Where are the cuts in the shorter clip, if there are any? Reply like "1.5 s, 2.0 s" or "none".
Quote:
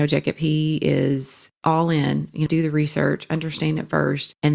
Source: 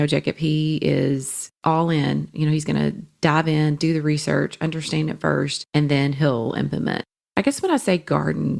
2.5 s